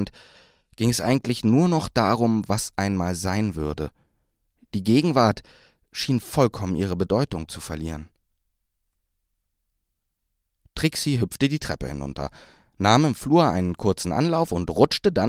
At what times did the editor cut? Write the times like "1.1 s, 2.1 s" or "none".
none